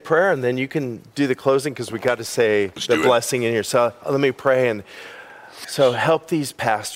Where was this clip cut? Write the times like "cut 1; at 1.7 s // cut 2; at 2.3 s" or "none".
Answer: cut 1; at 5.6 s